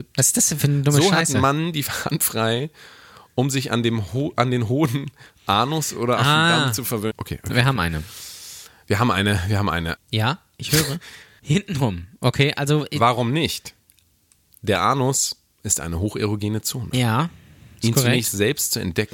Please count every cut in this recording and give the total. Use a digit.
3